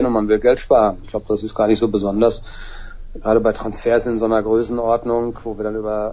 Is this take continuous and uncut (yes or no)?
no